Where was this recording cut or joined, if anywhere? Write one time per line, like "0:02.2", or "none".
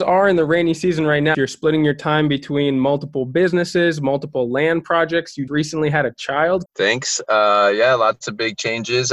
0:01.3
0:05.5
0:06.7